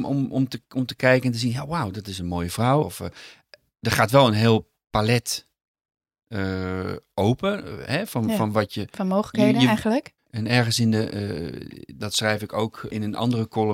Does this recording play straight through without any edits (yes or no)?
no